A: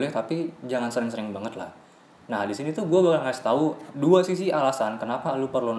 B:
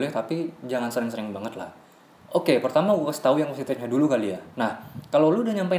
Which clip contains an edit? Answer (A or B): B